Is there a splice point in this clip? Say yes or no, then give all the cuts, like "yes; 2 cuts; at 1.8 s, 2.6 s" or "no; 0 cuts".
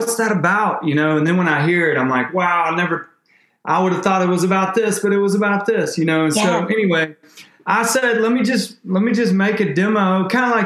no; 0 cuts